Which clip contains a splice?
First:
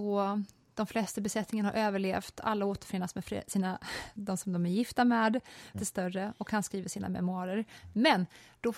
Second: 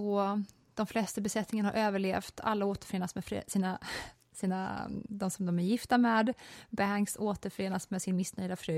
first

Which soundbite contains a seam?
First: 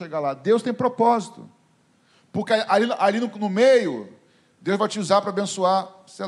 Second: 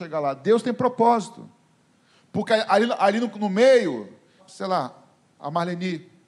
second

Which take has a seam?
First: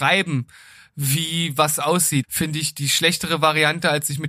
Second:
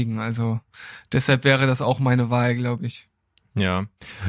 first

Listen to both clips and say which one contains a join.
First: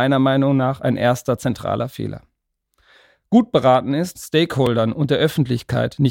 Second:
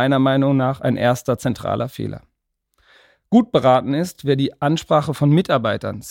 first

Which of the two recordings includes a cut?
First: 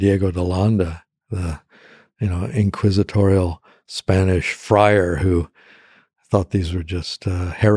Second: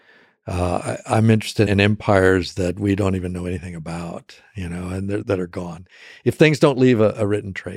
second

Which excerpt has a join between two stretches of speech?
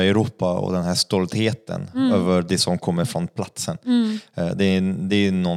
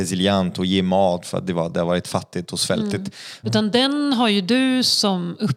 second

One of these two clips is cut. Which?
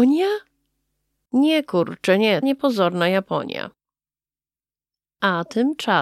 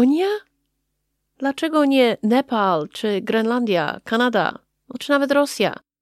first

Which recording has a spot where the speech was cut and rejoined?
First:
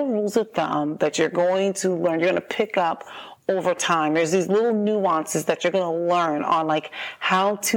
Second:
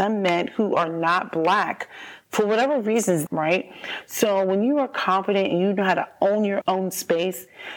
second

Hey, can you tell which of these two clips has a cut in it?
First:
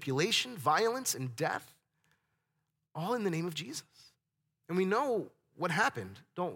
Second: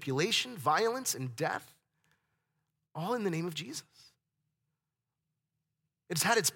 first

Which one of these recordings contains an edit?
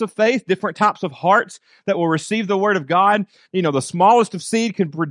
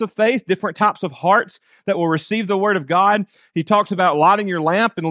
first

